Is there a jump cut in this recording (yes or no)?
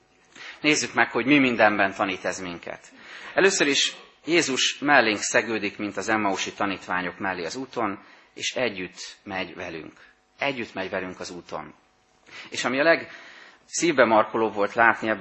no